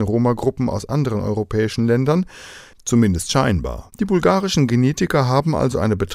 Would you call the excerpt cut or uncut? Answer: cut